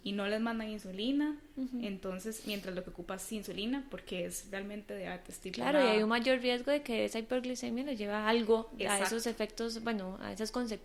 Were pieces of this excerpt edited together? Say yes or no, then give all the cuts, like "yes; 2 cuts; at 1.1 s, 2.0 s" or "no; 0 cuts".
no; 0 cuts